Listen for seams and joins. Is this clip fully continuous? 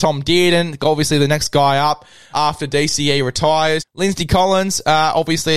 no; 2 cuts; at 2.3 s, 3.8 s

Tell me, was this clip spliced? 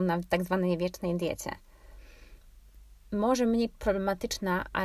no; 0 cuts

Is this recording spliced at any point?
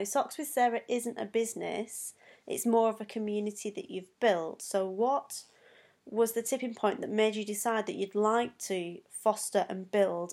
no; 0 cuts

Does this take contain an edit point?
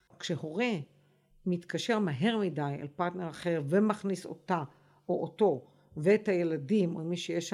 no; 0 cuts

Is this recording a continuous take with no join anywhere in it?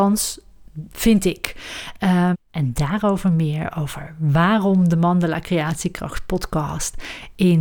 no; 1 cut; at 2.3 s

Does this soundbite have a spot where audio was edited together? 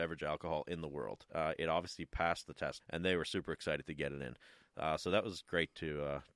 yes; 2 cuts; at 1.3 s, 2.8 s

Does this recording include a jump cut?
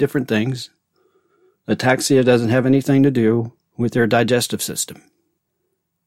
no; 0 cuts

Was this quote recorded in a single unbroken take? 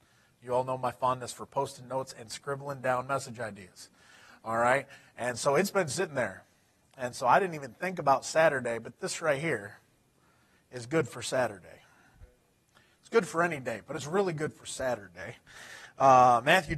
yes; 0 cuts

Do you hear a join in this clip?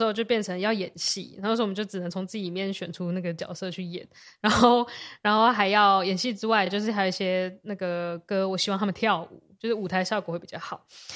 no; 0 cuts

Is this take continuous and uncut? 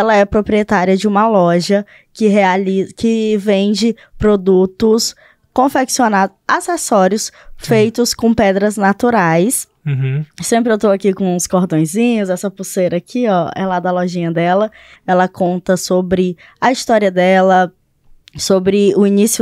no; 1 cut; at 14.9 s

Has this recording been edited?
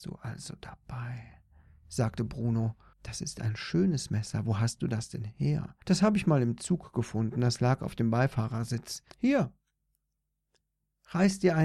yes; 3 cuts; at 2.9 s, 5.8 s, 9.1 s

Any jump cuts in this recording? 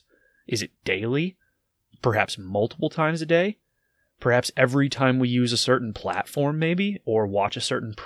no; 0 cuts

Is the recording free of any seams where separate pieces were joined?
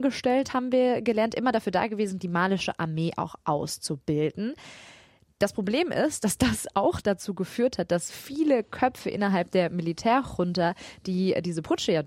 yes; 0 cuts

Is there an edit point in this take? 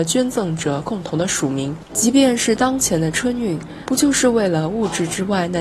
yes; 2 cuts; at 1.9 s, 3.8 s

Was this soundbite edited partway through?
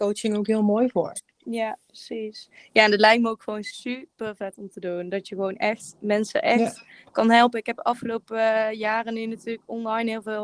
no; 0 cuts

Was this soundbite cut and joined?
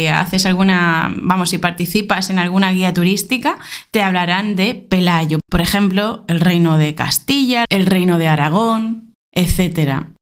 yes; 3 cuts; at 5.4 s, 7.6 s, 9.1 s

